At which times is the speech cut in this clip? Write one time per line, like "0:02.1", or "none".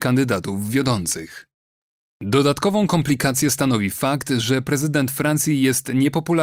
none